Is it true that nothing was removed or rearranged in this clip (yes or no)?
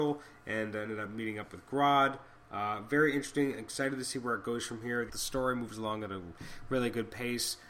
no